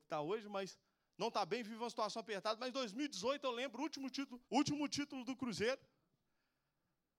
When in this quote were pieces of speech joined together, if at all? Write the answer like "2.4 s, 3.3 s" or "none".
4.4 s